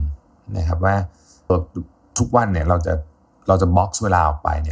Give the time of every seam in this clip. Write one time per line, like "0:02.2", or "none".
0:01.5